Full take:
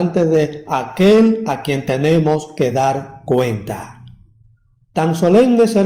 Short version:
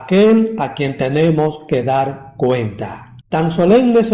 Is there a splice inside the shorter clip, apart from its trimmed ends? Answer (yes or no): yes